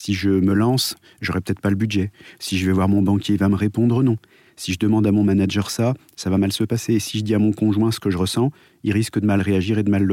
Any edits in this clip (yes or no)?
no